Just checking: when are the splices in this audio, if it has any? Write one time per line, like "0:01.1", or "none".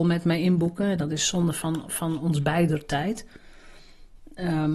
none